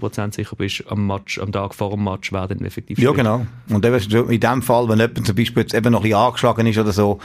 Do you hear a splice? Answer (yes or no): no